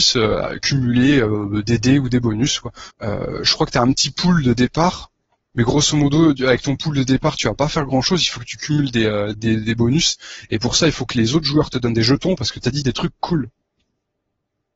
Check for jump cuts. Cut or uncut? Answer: cut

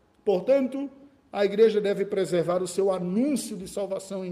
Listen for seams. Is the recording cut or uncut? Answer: uncut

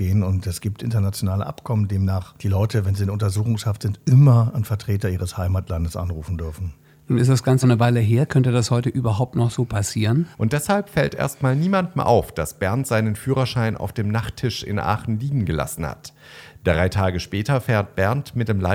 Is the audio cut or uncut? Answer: cut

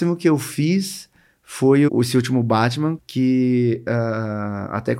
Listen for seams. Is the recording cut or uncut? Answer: cut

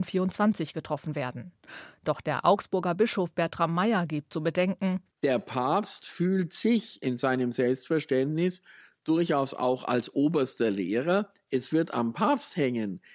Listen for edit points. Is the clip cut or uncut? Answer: uncut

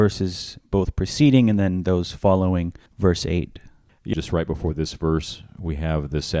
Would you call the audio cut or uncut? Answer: cut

